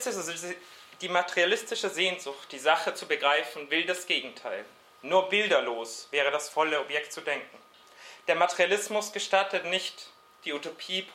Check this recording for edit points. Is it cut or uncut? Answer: uncut